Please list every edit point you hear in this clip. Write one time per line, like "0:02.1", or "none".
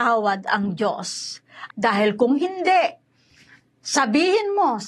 0:01.7